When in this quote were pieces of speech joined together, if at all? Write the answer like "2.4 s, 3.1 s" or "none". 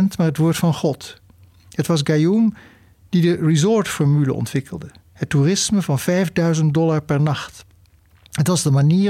none